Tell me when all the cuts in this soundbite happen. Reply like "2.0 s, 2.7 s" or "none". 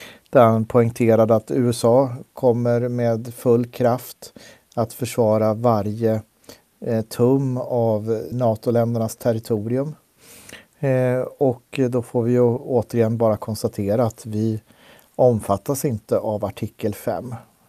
8.3 s